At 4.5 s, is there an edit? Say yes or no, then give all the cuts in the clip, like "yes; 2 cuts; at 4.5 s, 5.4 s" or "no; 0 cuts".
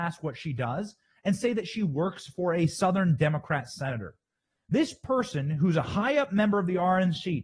yes; 1 cut; at 4.5 s